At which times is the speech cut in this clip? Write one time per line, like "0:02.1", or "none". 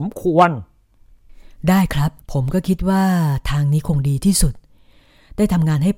0:02.2

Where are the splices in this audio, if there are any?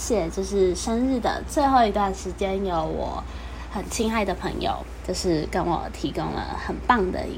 none

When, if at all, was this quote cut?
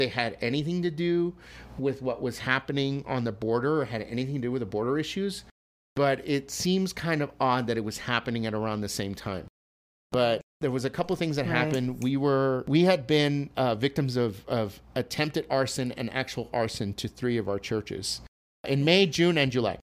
none

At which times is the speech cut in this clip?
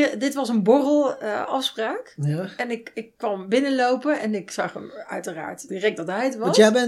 0:05.7

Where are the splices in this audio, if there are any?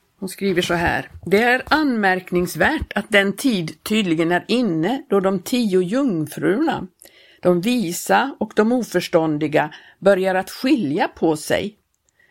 none

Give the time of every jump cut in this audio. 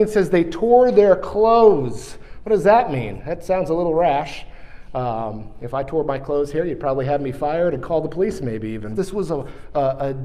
0:09.0

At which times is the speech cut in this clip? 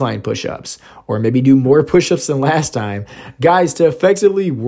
none

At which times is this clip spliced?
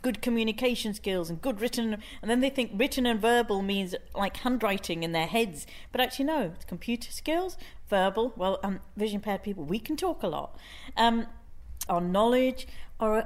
0:11.9

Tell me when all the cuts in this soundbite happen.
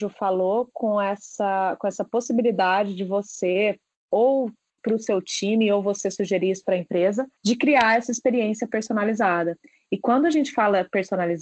0:07.4

